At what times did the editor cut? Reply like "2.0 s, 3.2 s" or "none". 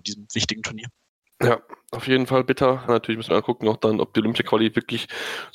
2.9 s